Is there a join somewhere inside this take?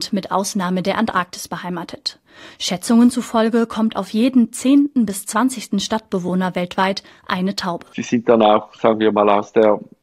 no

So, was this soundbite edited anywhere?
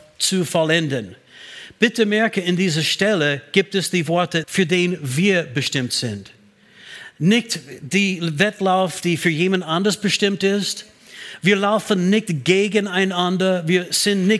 yes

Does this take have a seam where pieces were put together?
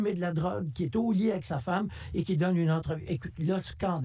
no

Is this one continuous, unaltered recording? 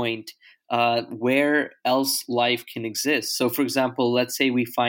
yes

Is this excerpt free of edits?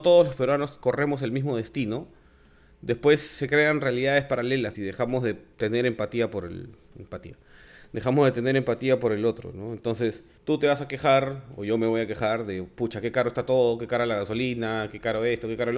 no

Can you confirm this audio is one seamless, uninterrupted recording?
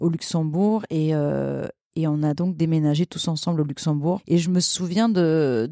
no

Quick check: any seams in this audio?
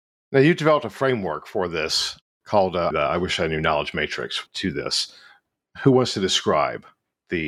yes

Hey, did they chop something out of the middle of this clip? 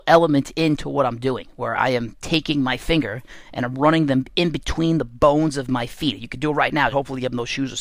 yes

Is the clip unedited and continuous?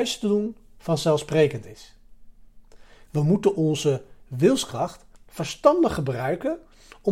no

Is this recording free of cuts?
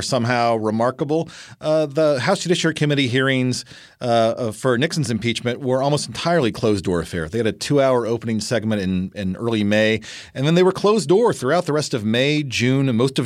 yes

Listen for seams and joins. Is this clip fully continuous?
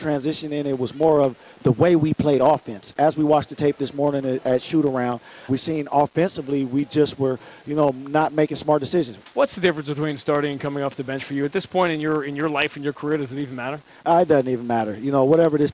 no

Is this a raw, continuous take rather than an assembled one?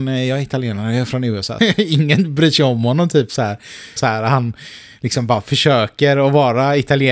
no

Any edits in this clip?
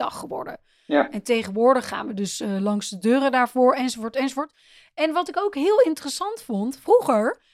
no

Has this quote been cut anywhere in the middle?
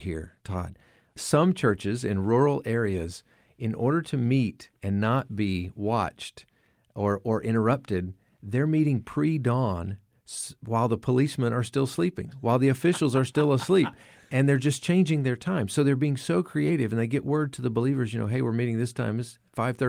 no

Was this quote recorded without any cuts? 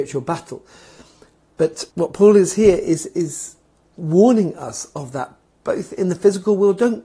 no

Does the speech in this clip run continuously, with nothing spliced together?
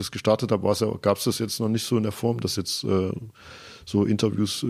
yes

